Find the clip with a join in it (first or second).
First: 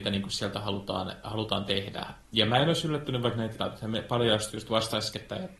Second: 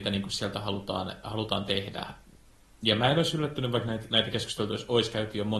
first